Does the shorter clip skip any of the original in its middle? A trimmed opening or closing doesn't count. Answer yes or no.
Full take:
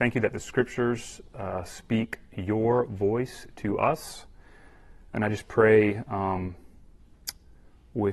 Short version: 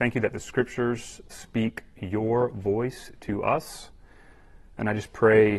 yes